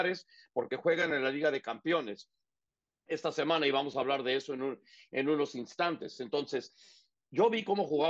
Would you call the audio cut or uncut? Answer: uncut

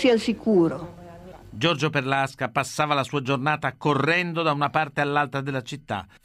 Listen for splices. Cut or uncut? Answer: cut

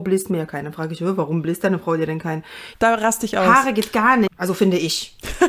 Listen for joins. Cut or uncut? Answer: cut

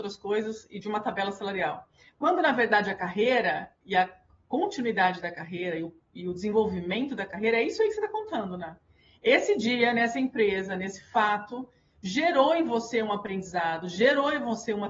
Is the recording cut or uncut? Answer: uncut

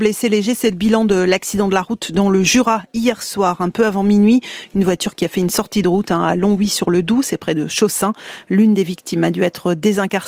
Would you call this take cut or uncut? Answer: uncut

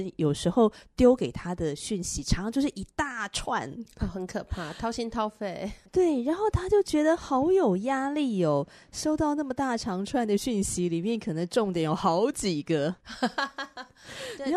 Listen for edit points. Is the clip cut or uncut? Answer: uncut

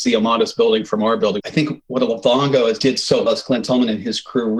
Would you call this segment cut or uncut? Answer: cut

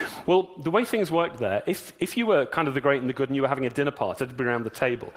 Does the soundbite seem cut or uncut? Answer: cut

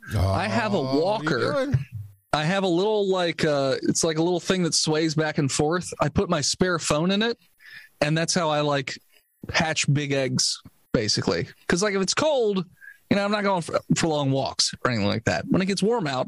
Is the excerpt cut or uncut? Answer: cut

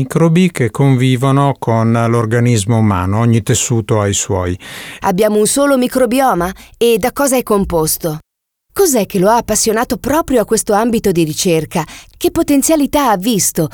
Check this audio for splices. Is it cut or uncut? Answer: cut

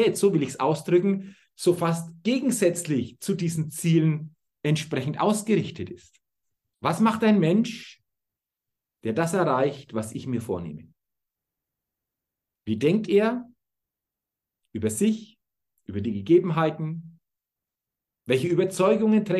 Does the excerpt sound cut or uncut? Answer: cut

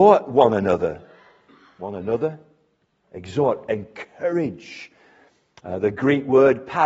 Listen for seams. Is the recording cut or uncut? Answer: uncut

